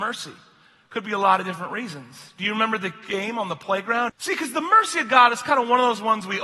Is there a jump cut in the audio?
yes; 1 cut; at 4.1 s

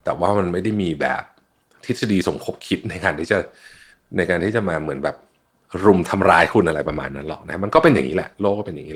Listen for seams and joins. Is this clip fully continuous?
yes; 0 cuts

